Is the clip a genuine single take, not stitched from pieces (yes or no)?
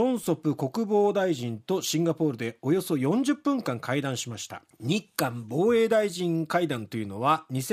no